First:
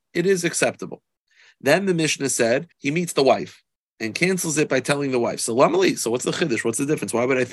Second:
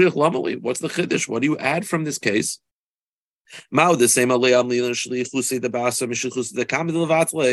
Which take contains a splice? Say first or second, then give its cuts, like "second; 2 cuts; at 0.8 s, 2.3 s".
first; 1 cut; at 2.7 s